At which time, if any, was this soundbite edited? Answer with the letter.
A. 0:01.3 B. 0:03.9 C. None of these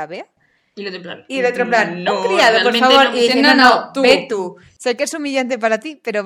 C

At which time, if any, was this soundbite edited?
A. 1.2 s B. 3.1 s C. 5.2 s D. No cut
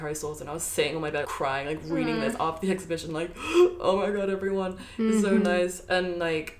A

